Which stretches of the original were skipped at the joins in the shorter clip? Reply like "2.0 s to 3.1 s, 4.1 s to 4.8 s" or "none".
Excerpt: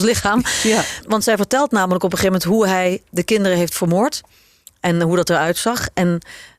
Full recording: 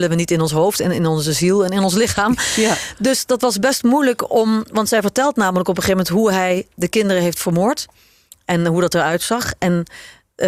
2.9 s to 4.7 s